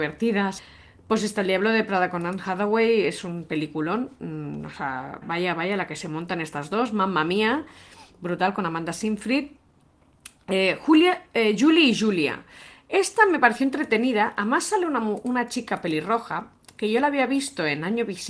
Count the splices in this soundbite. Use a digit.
1